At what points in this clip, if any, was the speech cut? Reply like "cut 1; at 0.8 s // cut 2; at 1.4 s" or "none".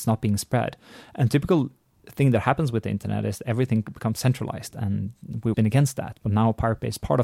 cut 1; at 5.5 s